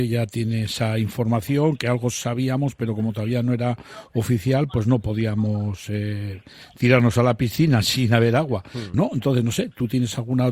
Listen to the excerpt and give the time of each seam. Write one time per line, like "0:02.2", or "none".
0:08.9